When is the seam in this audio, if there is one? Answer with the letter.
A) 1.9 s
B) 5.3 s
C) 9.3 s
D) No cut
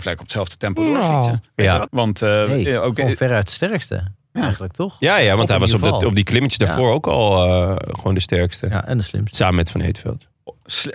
A